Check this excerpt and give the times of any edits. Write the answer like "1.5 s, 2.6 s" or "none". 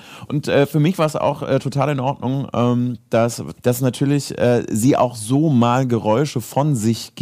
3.6 s